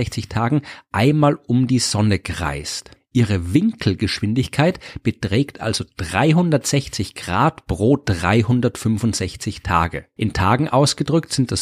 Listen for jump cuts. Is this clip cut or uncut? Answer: cut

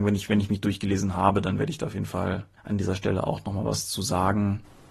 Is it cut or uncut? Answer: uncut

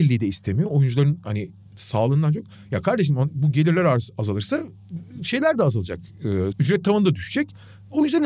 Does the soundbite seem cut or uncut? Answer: cut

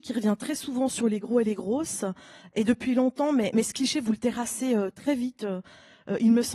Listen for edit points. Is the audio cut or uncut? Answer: uncut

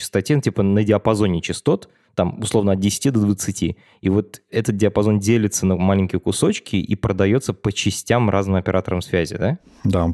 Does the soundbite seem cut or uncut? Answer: uncut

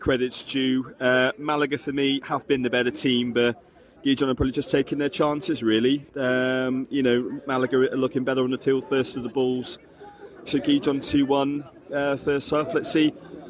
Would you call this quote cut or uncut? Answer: cut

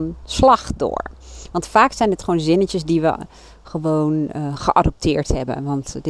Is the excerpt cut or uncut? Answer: uncut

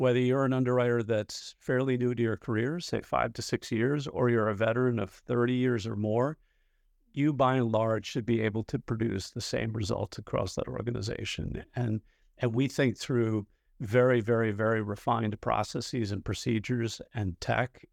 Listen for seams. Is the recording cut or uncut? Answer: uncut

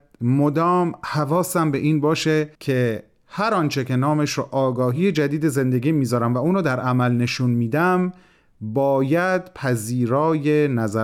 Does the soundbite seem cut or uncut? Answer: cut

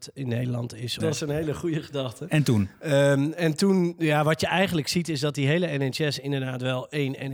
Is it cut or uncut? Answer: cut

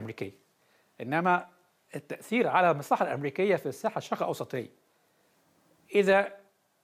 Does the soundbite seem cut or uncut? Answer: uncut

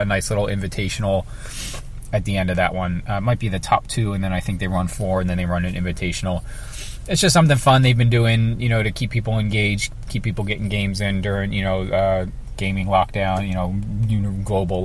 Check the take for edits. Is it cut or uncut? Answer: uncut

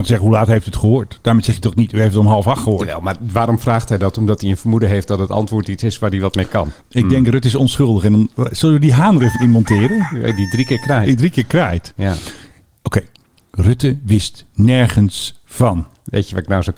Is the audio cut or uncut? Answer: cut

